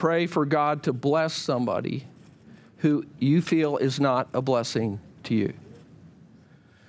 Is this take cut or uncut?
uncut